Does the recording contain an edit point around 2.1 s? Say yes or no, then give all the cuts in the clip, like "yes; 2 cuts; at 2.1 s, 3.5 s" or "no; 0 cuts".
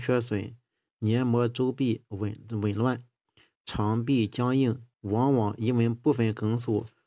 no; 1 cut; at 4.9 s